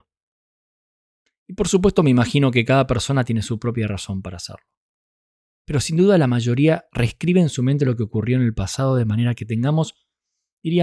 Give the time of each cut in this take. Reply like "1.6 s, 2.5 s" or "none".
none